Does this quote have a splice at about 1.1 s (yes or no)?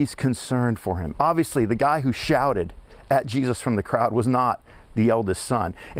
yes